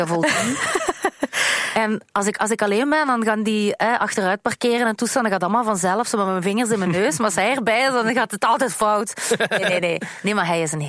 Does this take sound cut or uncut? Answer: cut